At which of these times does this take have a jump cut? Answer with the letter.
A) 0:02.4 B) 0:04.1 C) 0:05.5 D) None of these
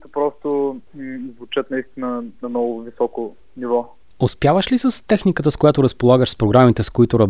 A